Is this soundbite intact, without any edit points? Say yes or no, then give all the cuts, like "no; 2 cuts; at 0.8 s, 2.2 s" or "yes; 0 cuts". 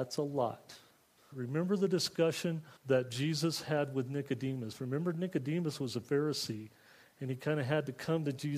no; 2 cuts; at 1.3 s, 2.8 s